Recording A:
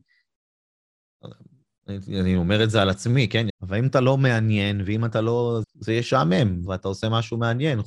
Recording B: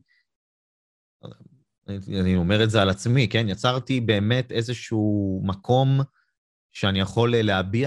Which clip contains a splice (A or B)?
A